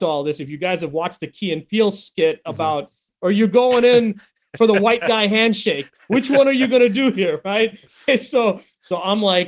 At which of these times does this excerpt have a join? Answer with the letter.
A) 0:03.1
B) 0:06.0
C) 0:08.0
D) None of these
A